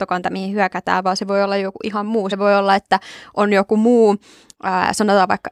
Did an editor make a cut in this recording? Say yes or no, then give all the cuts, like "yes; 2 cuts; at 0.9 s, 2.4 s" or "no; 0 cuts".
no; 0 cuts